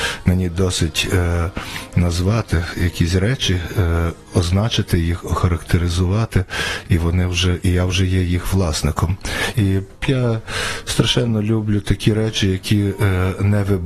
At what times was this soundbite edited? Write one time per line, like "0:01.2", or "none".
0:09.5